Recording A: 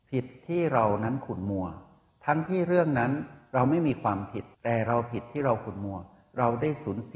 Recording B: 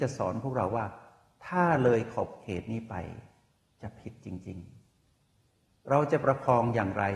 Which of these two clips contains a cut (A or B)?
A